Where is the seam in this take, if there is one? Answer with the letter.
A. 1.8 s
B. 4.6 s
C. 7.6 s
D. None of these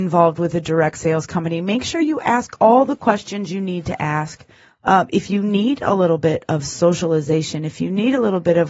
B